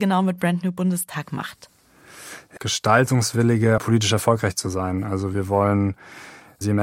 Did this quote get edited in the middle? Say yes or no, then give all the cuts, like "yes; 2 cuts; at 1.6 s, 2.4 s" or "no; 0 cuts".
yes; 2 cuts; at 2.6 s, 3.8 s